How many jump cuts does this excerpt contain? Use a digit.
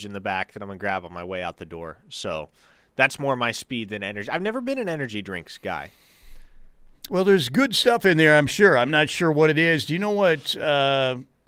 0